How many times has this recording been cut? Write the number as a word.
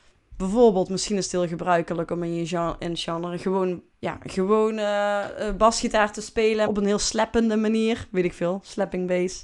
two